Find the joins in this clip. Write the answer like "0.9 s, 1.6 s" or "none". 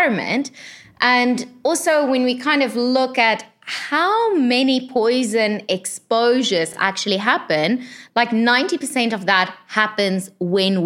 none